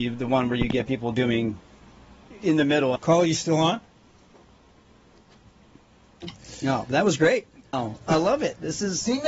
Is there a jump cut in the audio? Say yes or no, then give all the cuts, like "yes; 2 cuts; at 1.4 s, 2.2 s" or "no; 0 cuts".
yes; 2 cuts; at 3.0 s, 7.7 s